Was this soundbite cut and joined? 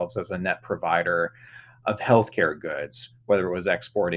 no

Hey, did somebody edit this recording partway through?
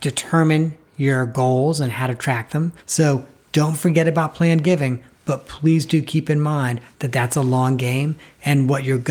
yes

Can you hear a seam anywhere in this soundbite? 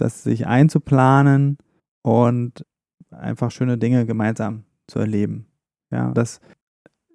yes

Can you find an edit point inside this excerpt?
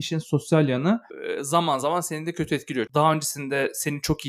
yes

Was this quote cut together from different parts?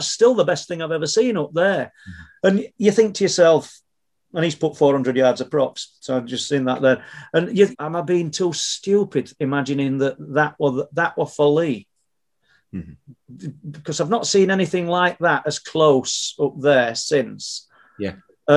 yes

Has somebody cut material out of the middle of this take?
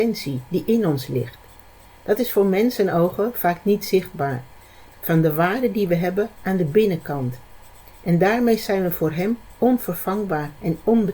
yes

